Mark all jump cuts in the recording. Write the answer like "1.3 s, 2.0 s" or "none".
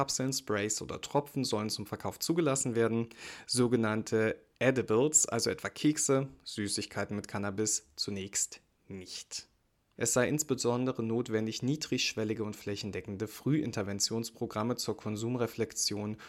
10.0 s

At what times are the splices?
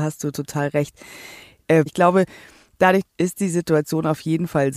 1.9 s, 3.0 s

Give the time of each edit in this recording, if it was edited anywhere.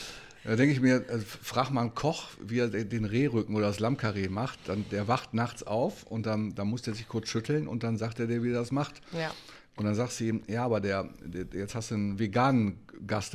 none

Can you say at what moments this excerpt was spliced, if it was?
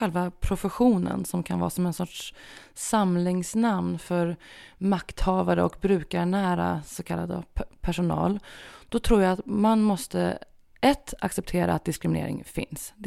none

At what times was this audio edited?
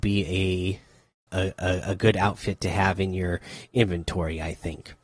1.3 s

